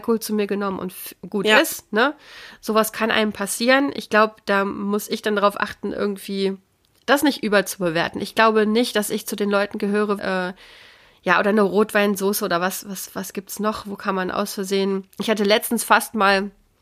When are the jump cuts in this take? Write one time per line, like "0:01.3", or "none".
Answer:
0:10.2